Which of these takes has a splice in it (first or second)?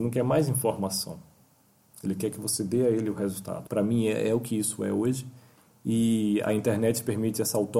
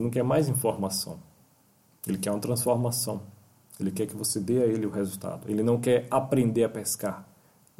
first